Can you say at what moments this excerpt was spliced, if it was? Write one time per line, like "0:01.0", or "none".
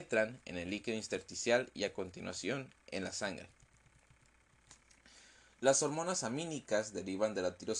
none